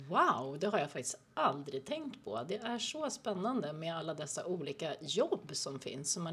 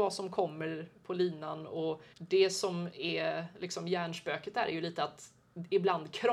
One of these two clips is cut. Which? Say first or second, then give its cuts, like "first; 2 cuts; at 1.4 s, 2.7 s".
second; 1 cut; at 2.1 s